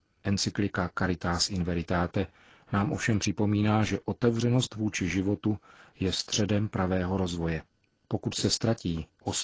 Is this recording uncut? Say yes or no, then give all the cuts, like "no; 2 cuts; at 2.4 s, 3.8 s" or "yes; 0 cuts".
yes; 0 cuts